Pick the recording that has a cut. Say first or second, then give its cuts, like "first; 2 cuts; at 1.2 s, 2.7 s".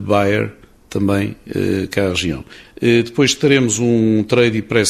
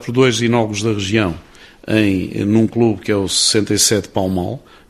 first; 1 cut; at 2.6 s